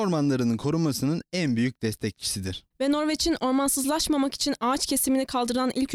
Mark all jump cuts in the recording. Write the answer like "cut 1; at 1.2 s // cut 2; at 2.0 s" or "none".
cut 1; at 2.7 s